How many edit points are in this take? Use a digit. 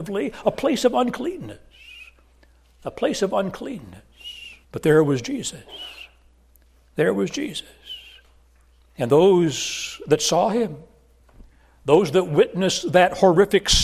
1